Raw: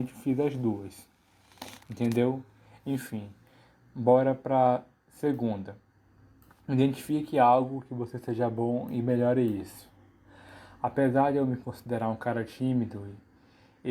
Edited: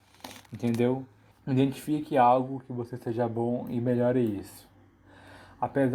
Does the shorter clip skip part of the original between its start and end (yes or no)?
yes